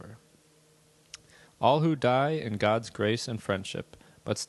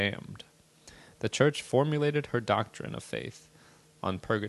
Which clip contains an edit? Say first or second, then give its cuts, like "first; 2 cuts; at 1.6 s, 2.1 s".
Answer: first; 1 cut; at 1.5 s